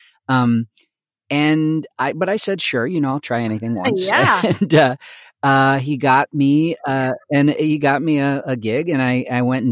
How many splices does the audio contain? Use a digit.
1